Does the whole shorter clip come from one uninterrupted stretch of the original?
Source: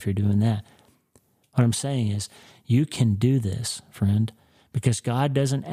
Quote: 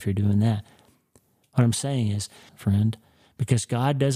no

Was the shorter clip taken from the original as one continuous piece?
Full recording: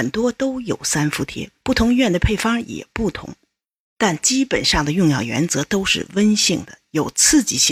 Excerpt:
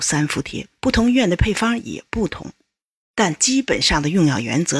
yes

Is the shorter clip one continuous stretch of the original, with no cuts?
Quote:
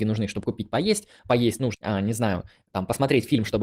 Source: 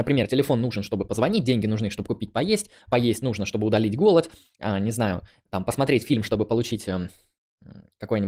no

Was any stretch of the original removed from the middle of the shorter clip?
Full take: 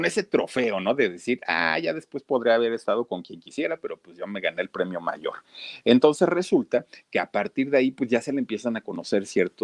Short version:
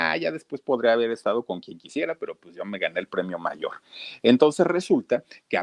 no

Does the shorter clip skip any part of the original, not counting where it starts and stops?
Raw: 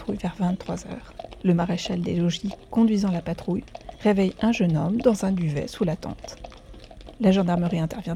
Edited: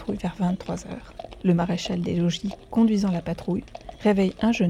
no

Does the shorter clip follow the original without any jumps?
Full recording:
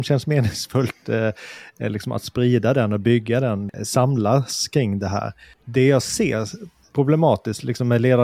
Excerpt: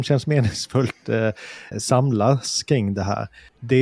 no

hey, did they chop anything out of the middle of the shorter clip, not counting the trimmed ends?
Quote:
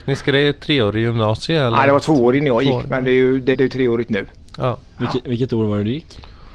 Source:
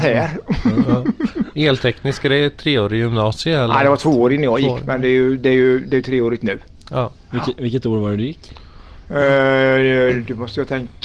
yes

